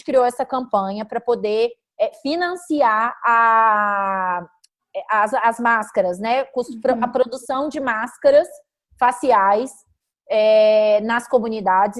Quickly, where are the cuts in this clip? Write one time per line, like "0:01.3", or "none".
none